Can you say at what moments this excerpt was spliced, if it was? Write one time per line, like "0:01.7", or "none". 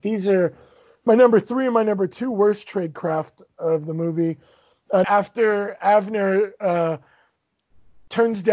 0:05.0